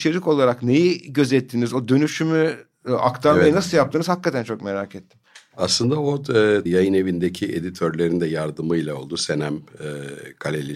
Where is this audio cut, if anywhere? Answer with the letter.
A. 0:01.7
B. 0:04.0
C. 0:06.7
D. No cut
C